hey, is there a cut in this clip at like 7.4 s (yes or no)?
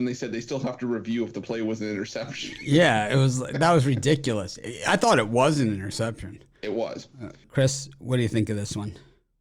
yes